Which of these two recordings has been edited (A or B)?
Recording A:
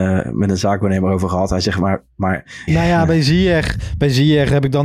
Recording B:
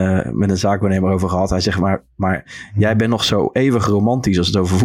A